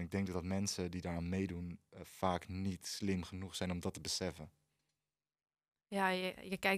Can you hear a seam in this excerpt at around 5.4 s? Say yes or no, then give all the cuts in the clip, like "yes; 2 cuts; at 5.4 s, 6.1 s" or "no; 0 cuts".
no; 0 cuts